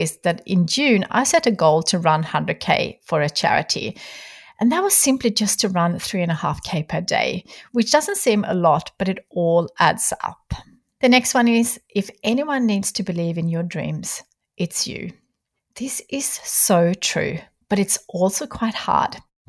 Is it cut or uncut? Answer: uncut